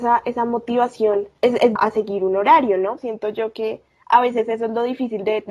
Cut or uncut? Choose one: cut